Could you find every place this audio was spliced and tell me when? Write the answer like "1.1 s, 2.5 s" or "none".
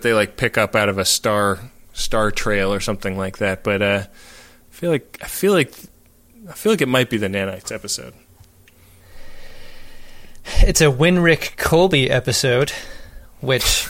none